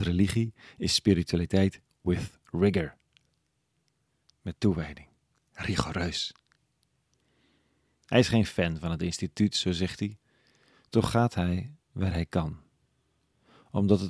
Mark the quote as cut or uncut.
uncut